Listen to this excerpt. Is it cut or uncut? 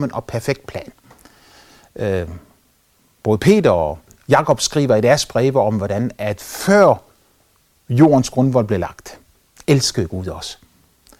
uncut